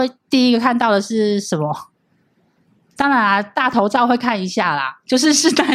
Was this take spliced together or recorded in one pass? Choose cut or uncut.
uncut